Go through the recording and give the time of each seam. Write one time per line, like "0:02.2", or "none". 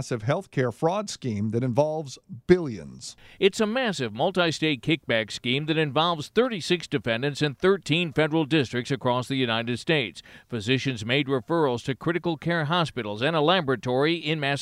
none